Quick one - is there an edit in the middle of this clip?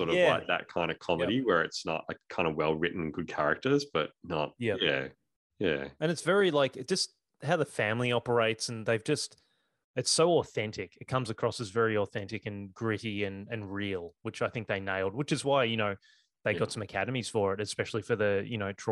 no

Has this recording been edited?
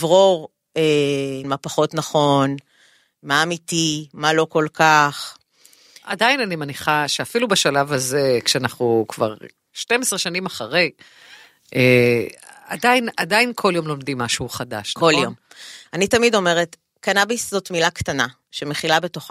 yes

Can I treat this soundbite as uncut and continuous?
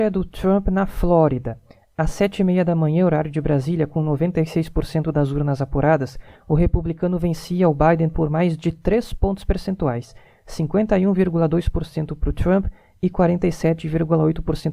yes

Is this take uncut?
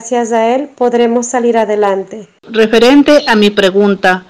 no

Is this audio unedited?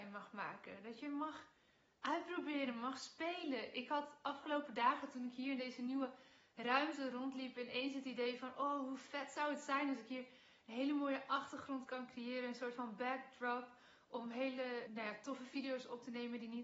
no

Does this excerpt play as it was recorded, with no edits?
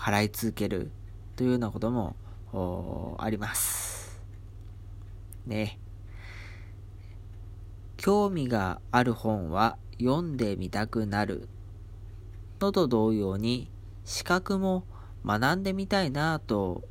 yes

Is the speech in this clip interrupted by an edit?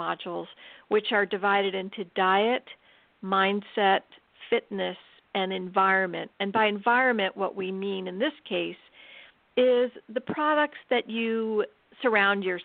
no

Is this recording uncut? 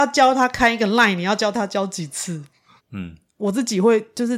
no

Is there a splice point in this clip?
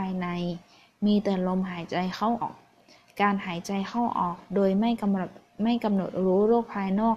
yes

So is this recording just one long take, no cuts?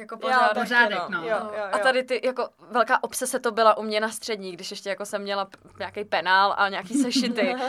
yes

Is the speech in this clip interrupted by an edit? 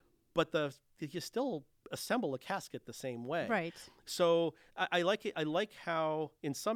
no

